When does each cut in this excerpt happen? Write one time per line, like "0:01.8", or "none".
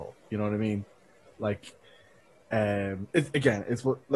none